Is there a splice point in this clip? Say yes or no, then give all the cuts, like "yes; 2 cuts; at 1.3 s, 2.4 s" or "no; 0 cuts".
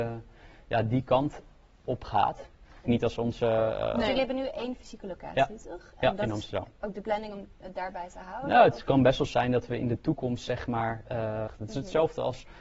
yes; 2 cuts; at 2.8 s, 11.5 s